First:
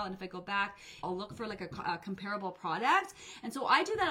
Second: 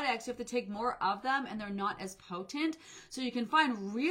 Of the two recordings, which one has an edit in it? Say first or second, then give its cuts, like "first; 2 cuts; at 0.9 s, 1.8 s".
first; 1 cut; at 1.0 s